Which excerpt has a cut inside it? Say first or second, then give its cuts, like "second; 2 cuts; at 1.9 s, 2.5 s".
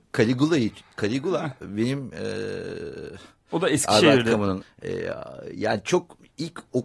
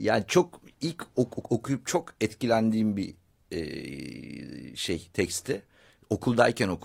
first; 1 cut; at 4.6 s